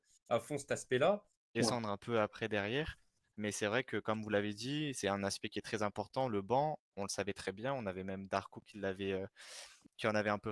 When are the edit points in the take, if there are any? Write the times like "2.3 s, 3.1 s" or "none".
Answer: 1.5 s